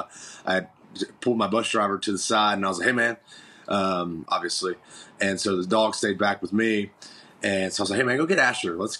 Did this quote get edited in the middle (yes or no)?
yes